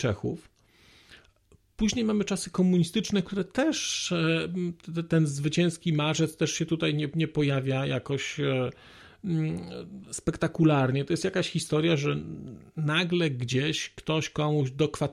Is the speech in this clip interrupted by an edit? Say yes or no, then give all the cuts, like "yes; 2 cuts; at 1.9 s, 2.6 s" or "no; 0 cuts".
no; 0 cuts